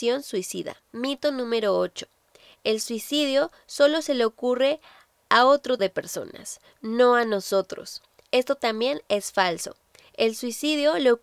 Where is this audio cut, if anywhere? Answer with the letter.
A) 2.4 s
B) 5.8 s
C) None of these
B